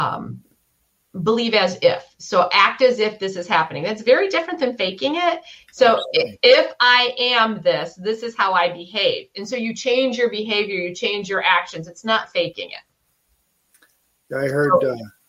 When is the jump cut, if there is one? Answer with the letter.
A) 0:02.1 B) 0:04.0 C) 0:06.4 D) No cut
D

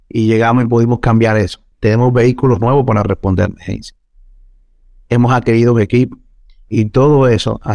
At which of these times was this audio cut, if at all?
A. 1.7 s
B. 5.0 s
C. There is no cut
A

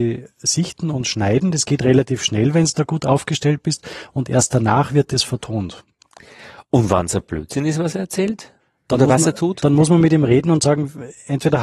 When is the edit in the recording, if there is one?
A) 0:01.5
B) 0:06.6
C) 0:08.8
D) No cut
D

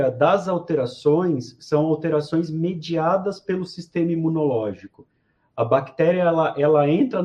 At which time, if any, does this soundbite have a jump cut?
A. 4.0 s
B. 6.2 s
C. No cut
C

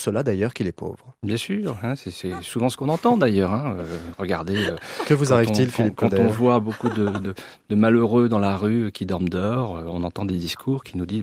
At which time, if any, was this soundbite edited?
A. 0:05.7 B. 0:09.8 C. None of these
C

